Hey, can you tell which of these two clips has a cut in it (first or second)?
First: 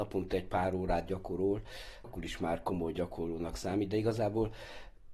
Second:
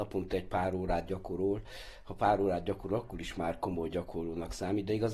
first